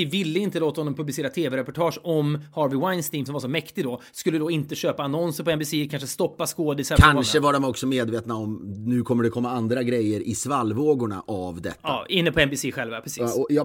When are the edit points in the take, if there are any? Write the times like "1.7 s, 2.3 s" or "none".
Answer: 3.3 s